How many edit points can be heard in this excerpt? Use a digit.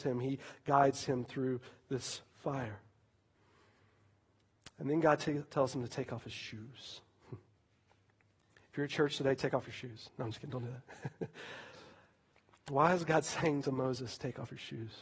0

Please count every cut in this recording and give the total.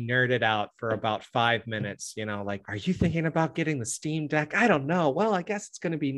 1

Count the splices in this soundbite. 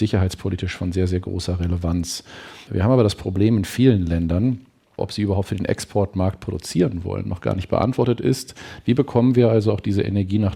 2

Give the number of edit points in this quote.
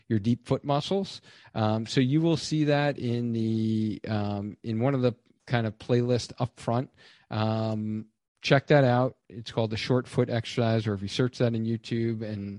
0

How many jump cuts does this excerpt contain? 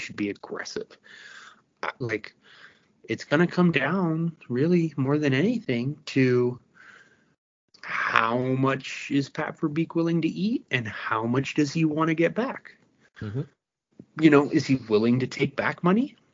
1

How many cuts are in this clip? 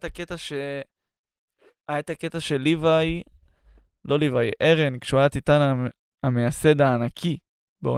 0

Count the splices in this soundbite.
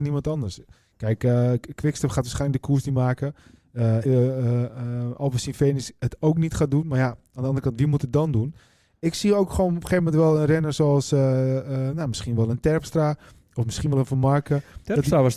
1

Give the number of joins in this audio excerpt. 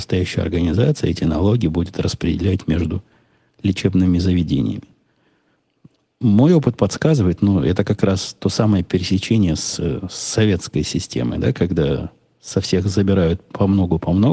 0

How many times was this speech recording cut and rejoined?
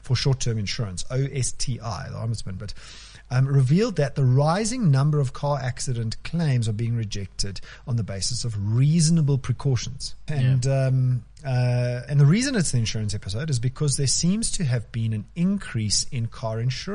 3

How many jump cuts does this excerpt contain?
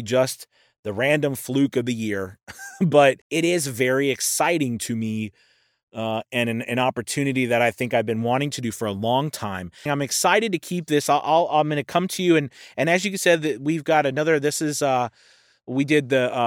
2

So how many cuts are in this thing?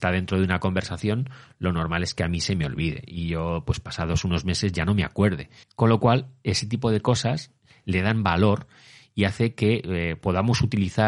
1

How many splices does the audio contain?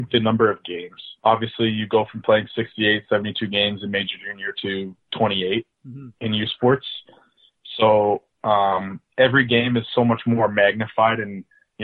1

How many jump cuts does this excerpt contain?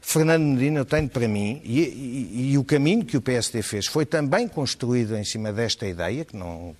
1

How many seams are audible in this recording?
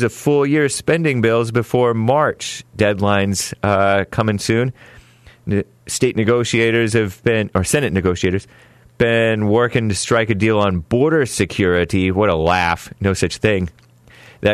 0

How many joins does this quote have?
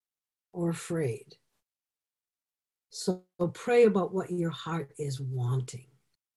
1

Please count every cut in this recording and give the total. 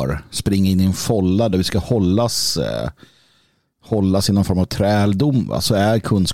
0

